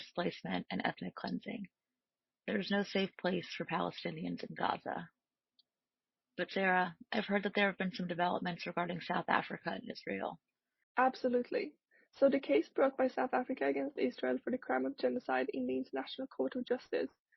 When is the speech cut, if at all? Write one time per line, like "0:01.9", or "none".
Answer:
0:10.8